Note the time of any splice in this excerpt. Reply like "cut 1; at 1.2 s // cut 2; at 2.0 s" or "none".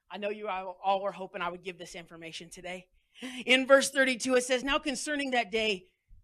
none